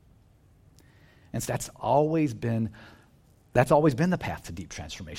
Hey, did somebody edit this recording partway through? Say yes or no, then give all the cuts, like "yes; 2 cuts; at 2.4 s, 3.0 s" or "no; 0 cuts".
yes; 1 cut; at 1.5 s